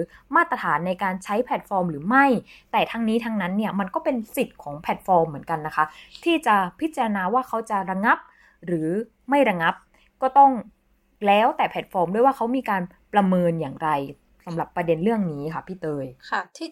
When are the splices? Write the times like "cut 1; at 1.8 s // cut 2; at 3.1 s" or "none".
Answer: none

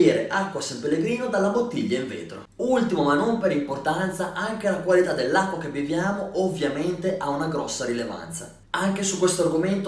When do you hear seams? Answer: cut 1; at 2.5 s // cut 2; at 8.7 s

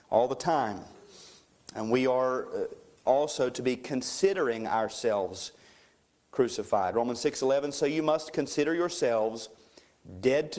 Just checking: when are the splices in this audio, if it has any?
none

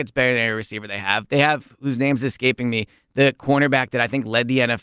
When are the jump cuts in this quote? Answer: none

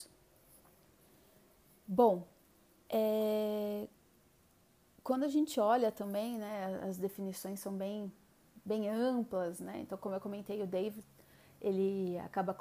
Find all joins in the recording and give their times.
none

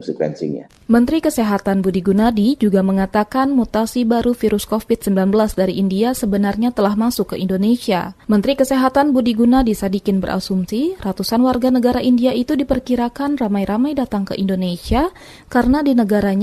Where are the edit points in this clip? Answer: cut 1; at 8.2 s

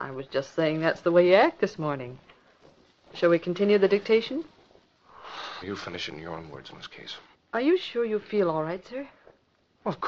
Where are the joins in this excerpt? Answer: cut 1; at 5.6 s // cut 2; at 7.3 s

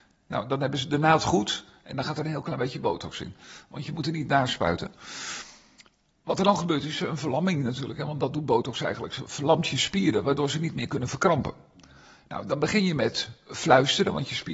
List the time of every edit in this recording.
none

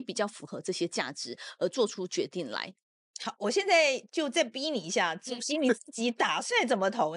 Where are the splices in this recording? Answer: none

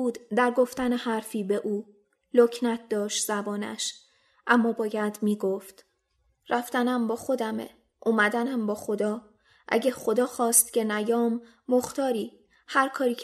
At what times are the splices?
none

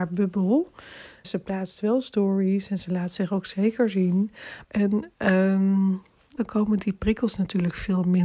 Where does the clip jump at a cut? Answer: cut 1; at 1.2 s // cut 2; at 4.6 s // cut 3; at 6.4 s

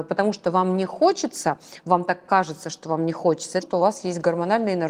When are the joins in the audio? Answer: cut 1; at 3.6 s

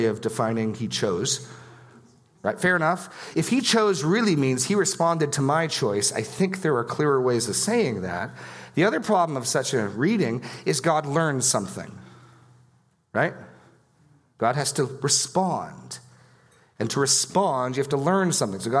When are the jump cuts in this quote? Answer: none

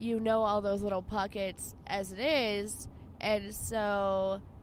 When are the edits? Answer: none

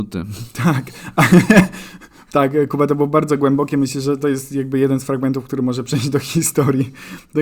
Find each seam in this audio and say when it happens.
none

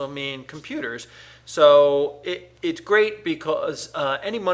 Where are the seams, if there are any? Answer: cut 1; at 2.6 s

